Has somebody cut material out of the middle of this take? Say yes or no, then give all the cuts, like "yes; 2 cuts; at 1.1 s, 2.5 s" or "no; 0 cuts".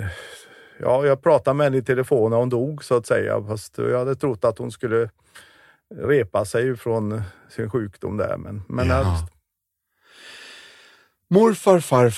yes; 1 cut; at 9.0 s